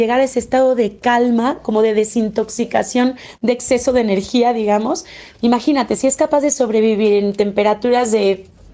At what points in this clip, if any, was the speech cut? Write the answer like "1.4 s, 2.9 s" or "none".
5.3 s